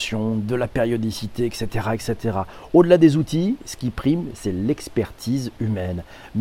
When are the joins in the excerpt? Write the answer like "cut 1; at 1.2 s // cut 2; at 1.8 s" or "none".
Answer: none